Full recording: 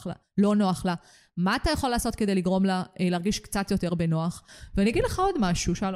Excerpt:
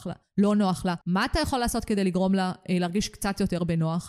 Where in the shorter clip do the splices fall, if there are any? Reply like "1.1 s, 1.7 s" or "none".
1.0 s